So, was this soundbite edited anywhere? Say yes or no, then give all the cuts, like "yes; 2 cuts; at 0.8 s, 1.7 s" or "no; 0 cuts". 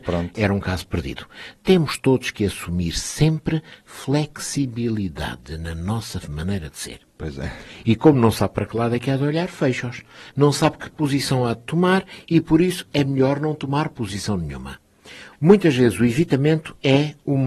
yes; 2 cuts; at 7.0 s, 15.3 s